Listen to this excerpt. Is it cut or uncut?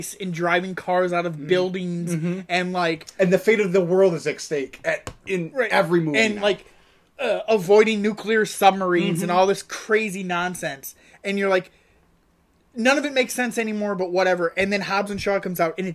uncut